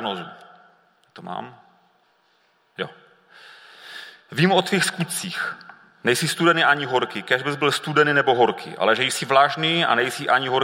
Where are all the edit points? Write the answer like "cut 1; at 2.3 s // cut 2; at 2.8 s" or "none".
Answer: none